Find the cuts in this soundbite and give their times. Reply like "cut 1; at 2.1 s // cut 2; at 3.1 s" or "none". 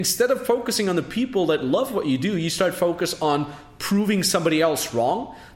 none